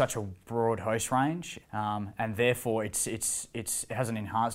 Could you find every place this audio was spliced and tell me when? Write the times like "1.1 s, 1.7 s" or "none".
1.6 s